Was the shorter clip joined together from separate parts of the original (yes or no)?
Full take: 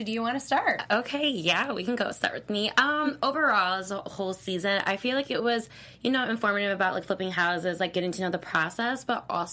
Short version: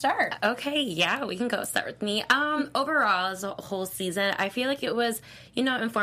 no